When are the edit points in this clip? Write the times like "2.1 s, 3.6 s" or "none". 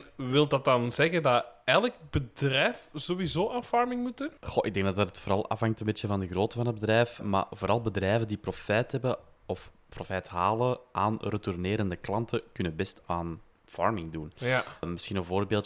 4.4 s